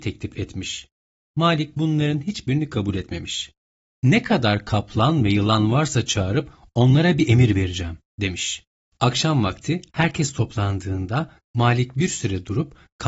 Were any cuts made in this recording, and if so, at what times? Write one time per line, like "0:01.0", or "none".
0:03.9